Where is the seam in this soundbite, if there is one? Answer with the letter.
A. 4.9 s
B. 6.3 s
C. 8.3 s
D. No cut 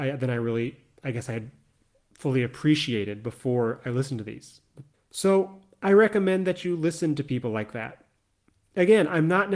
A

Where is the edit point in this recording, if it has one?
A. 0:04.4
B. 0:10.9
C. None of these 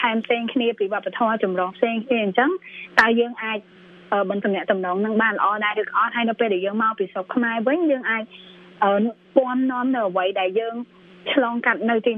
A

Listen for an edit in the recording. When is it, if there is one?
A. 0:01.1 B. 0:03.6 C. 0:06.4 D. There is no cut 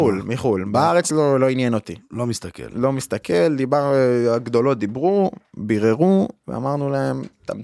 D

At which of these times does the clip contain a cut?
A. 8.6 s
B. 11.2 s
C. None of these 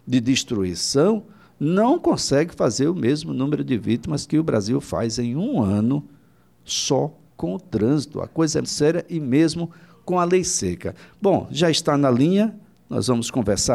A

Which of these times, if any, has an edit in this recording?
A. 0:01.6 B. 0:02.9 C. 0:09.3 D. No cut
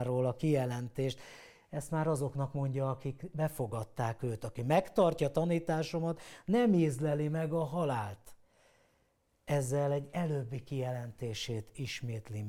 D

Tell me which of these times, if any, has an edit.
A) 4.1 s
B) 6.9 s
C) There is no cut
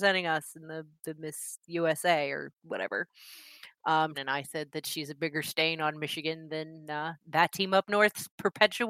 A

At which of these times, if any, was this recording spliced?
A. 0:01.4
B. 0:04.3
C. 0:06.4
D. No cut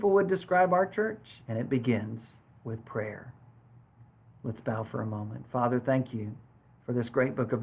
A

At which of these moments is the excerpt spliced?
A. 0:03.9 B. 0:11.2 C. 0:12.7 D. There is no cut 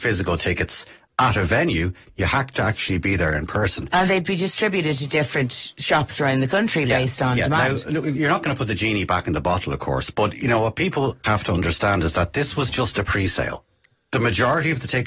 B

